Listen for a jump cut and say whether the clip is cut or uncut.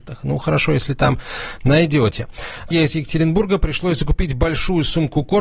cut